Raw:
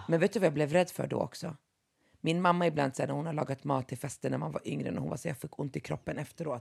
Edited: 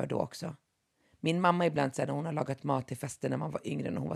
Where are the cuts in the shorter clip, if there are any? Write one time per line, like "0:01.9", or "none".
none